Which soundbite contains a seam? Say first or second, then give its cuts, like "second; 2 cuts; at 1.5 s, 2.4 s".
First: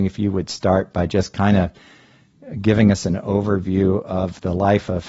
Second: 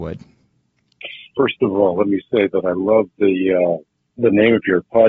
second; 1 cut; at 1.3 s